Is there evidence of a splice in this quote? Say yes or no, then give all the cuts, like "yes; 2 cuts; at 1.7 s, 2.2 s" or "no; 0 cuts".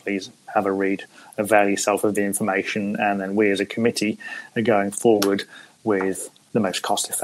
no; 0 cuts